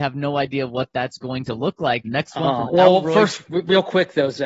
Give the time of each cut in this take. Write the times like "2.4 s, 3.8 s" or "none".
2.0 s